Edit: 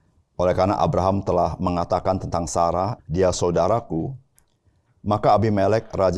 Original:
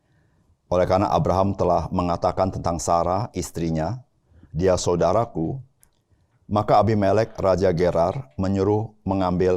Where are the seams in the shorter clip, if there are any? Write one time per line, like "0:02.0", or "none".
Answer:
0:03.0

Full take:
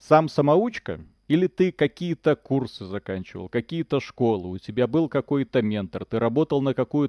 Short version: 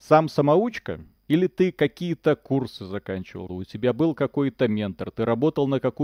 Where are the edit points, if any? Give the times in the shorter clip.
0:03.5

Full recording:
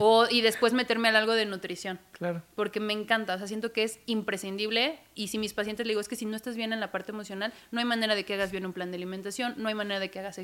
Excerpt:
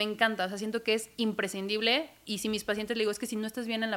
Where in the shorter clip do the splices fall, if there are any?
none

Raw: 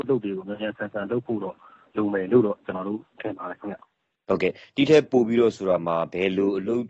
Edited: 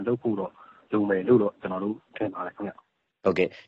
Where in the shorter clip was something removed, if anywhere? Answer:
none

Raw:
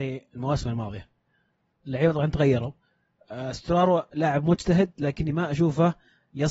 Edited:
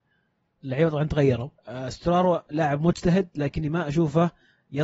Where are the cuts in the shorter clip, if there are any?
0:01.6

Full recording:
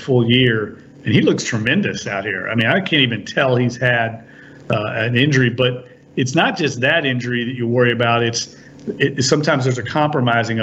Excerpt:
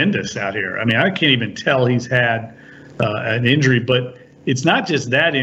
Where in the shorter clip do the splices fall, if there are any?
none

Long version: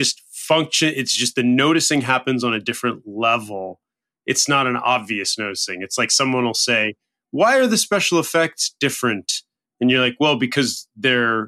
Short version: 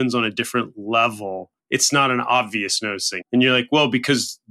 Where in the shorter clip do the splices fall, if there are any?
0:01.6
0:03.2

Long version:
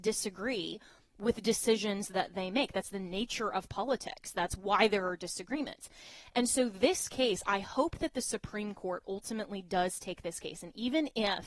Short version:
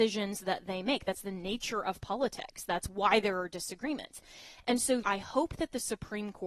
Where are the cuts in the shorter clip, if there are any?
0:05.0

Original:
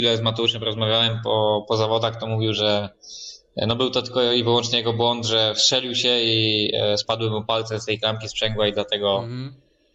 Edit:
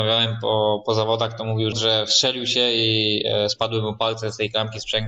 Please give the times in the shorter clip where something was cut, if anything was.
0:01.7

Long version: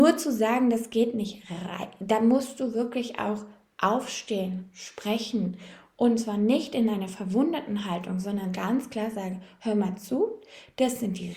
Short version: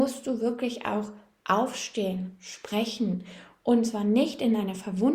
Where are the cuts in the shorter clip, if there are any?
none

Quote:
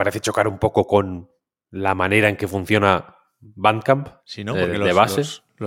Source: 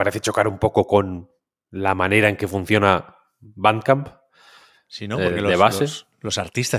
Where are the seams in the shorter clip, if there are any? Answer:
0:04.2

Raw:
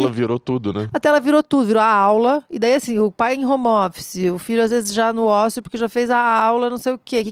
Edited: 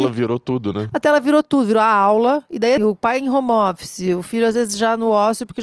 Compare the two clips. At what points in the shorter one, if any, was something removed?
0:02.8

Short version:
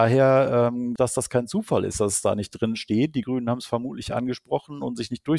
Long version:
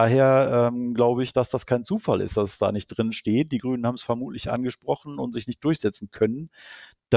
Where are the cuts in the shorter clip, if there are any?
0:01.0

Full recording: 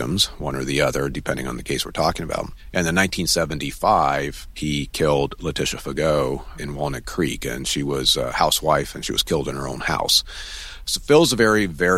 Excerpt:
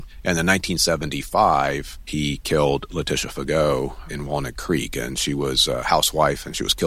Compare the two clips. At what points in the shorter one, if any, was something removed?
none

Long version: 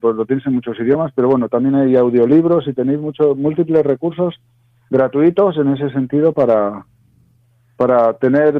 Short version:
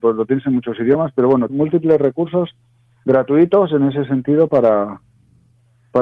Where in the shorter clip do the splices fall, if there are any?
0:01.5

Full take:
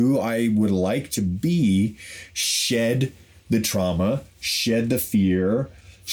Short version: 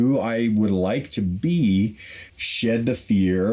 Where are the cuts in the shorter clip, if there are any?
0:02.3

